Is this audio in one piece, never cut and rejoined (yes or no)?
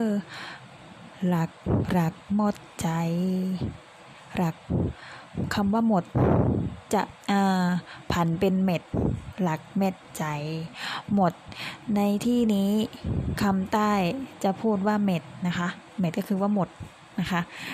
no